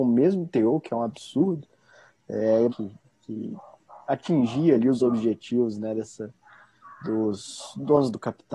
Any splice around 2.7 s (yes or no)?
yes